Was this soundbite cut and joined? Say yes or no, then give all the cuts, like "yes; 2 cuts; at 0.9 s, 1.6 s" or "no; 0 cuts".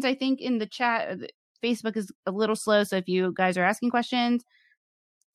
no; 0 cuts